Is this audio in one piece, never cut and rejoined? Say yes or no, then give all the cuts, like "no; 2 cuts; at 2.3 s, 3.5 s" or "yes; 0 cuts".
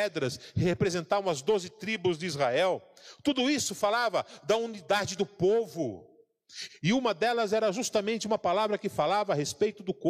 no; 1 cut; at 6.7 s